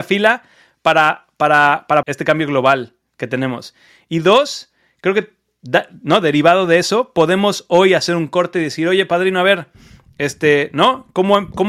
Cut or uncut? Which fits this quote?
cut